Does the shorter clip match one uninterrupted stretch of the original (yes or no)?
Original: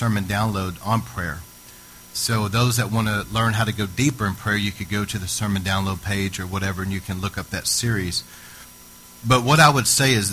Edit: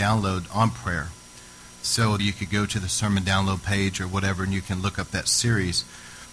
no